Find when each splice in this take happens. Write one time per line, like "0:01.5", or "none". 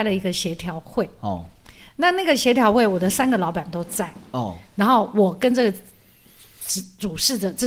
none